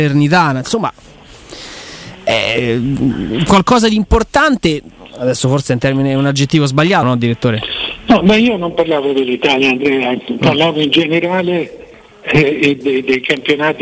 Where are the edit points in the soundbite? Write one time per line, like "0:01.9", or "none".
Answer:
0:07.0
0:12.8